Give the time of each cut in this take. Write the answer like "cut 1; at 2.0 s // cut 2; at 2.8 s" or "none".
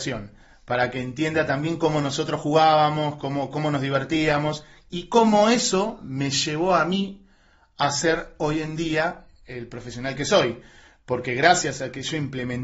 none

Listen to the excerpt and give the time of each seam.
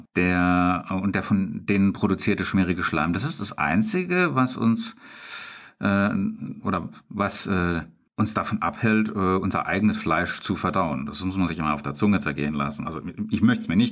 none

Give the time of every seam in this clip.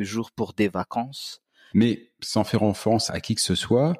cut 1; at 1.7 s // cut 2; at 3.1 s

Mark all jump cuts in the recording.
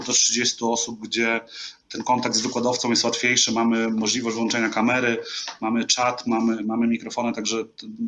none

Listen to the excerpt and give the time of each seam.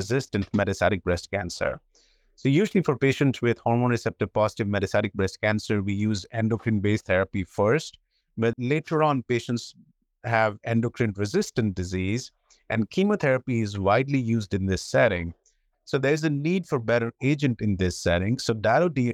cut 1; at 8.5 s // cut 2; at 15.7 s

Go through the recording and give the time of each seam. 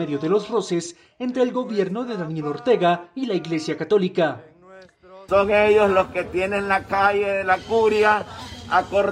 cut 1; at 5.3 s

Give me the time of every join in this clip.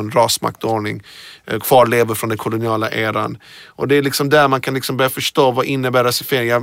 none

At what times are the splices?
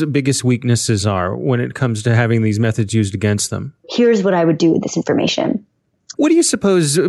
cut 1; at 3.8 s // cut 2; at 6.1 s

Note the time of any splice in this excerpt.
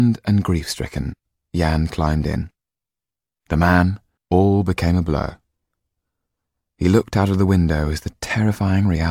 cut 1; at 4.2 s

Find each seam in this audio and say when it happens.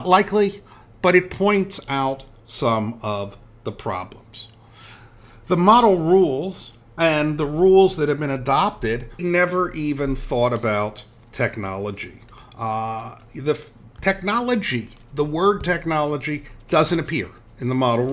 cut 1; at 9.2 s

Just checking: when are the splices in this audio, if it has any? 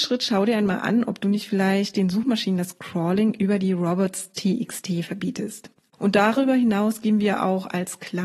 cut 1; at 5.9 s

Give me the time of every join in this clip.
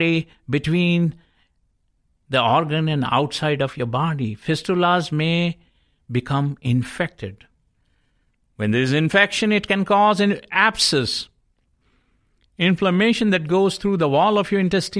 none

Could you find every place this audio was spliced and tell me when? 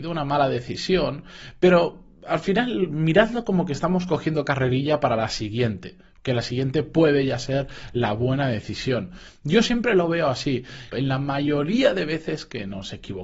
cut 1; at 10.9 s

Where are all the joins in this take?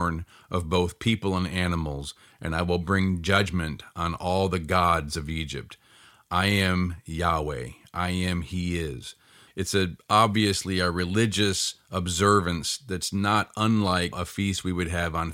cut 1; at 9.5 s // cut 2; at 14.1 s

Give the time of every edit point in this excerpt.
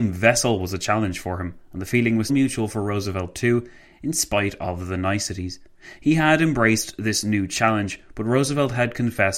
cut 1; at 2.3 s

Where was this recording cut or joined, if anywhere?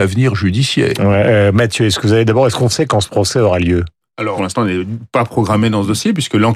cut 1; at 4.4 s

